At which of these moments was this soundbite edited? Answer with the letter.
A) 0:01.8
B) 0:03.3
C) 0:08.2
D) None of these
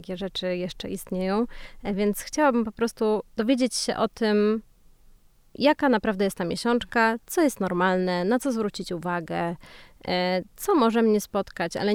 B